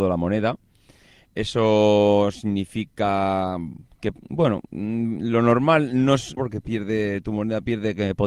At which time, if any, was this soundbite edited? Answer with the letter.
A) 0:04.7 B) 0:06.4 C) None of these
B